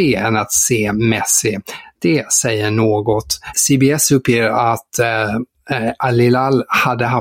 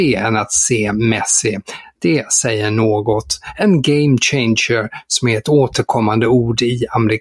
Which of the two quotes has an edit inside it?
first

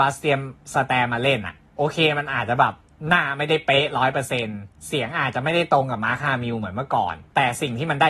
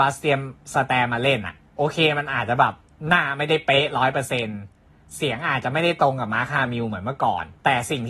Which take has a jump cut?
first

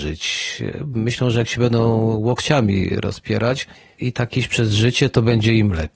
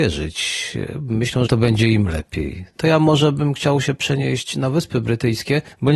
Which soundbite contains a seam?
second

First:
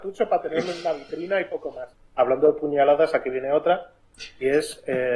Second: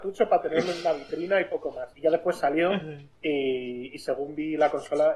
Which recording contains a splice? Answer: first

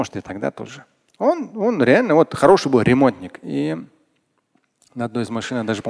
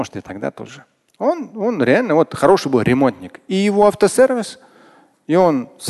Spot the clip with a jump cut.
first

